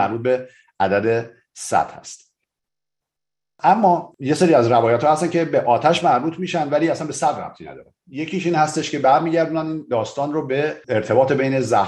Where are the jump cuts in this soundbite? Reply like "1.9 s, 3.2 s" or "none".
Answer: none